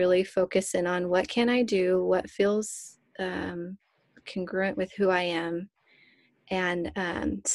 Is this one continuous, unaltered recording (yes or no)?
yes